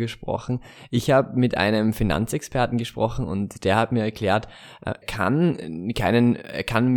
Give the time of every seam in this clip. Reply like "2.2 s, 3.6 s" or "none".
5.0 s